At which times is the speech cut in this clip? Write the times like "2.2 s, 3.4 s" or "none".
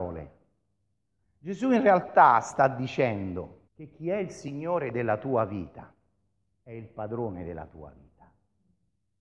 1.2 s, 3.7 s